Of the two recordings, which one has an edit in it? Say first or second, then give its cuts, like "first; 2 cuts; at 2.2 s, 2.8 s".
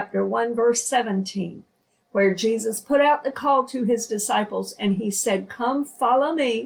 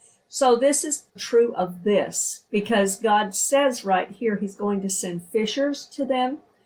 second; 2 cuts; at 1.1 s, 2.5 s